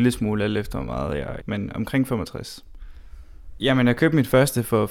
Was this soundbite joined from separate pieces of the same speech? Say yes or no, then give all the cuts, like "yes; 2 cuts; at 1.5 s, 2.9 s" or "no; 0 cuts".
yes; 2 cuts; at 1.4 s, 3.6 s